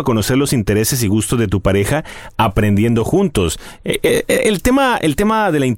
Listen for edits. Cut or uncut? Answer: uncut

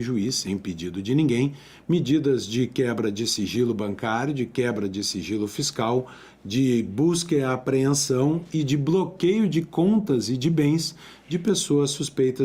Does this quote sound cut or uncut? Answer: uncut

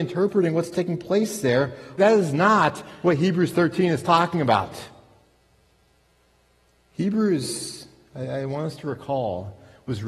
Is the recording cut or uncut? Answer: cut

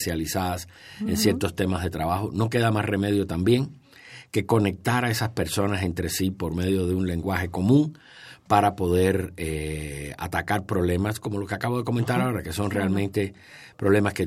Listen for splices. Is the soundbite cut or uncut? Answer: uncut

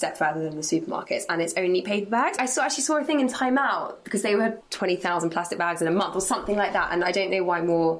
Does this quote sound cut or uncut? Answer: cut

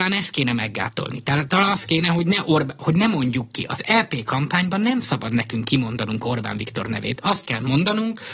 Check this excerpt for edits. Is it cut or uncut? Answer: uncut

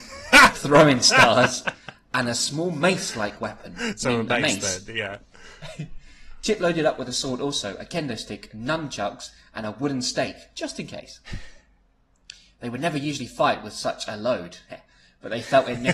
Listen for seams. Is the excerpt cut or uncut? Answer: uncut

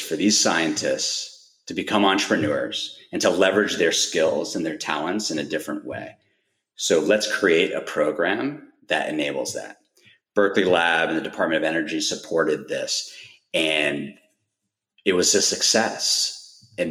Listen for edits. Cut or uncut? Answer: uncut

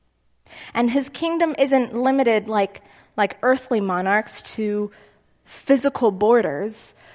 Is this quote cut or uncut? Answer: uncut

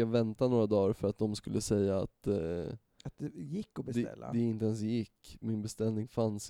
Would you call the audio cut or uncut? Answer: uncut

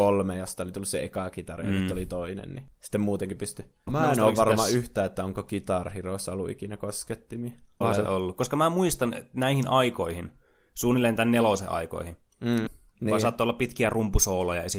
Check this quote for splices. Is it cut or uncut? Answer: cut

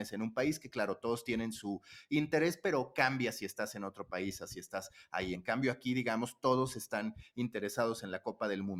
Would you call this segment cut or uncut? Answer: uncut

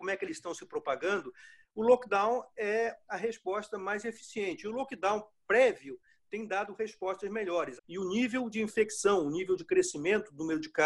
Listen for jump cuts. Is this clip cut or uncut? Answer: cut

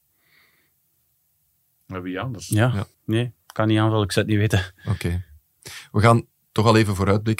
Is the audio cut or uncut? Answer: cut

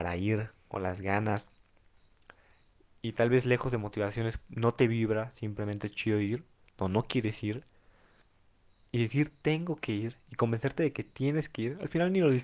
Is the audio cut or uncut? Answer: uncut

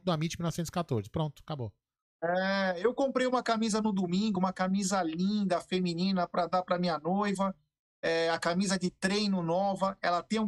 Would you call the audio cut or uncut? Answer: uncut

